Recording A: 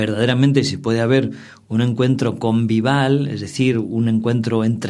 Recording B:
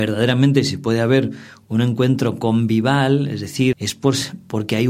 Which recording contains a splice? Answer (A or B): B